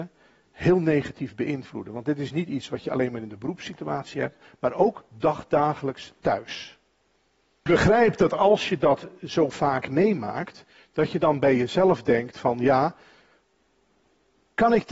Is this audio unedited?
yes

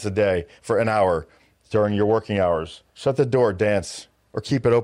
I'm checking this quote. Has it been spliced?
yes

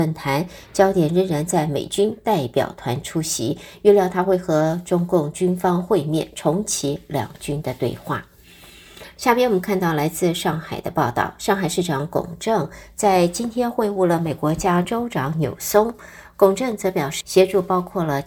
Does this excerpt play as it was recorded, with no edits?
no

